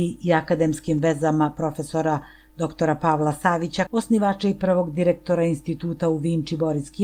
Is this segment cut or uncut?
cut